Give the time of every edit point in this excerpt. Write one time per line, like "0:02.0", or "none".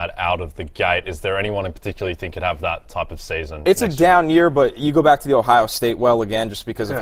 none